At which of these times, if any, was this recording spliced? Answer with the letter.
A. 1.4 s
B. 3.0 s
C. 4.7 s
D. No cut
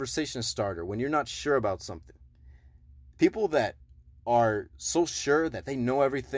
D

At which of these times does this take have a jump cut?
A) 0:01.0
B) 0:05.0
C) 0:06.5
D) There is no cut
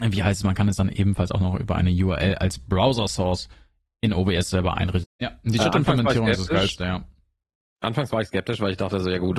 B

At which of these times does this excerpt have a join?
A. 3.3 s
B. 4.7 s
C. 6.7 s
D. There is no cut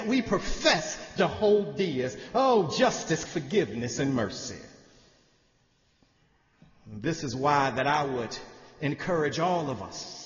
A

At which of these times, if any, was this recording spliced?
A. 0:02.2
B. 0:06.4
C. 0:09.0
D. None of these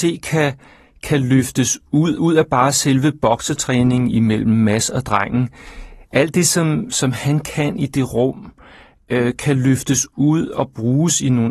A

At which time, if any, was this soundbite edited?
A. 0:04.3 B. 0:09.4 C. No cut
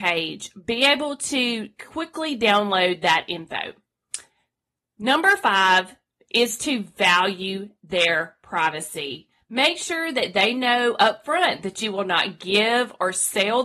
C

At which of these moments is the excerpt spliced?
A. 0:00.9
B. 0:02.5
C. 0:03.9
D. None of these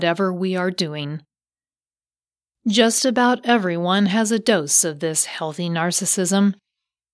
B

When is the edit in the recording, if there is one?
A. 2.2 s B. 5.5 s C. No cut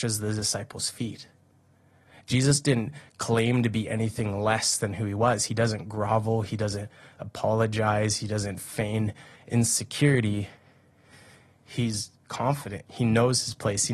C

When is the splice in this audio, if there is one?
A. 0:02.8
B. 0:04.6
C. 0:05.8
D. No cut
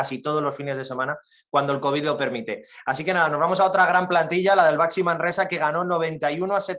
D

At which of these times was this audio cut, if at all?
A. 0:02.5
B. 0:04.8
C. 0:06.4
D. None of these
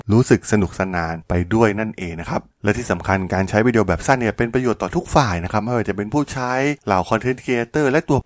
A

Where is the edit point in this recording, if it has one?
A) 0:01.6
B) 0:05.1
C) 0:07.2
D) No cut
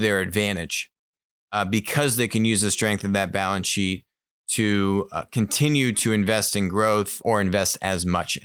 C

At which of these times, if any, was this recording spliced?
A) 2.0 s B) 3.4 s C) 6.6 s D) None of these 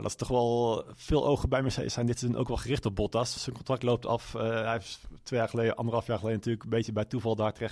D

